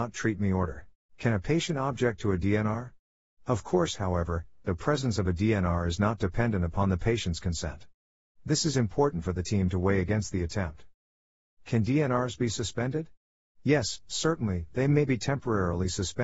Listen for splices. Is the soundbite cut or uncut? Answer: cut